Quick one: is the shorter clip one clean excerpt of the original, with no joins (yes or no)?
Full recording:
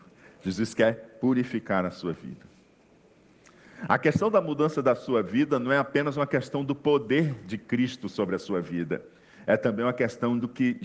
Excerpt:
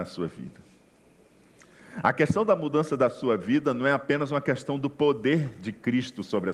yes